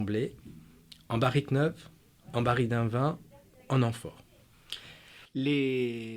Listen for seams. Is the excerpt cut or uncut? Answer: uncut